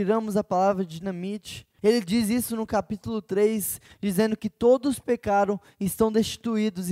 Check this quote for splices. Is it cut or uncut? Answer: cut